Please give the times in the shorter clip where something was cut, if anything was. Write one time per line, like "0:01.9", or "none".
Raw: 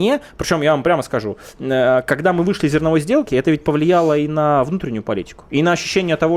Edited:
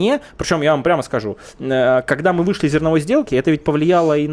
none